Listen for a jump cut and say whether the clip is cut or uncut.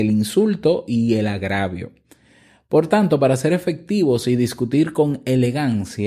uncut